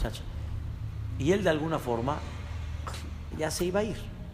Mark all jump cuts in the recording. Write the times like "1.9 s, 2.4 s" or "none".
3.3 s